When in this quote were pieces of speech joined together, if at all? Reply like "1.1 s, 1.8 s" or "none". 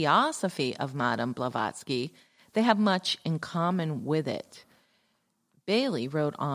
none